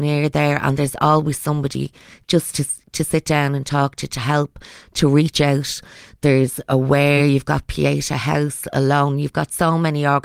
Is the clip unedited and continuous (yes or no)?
yes